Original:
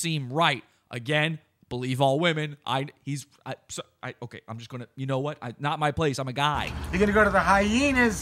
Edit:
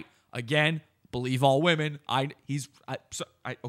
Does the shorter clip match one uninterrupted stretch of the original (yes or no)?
yes